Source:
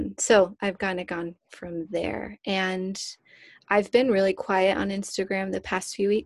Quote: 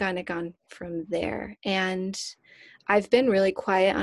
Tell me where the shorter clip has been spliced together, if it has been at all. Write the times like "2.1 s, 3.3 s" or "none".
none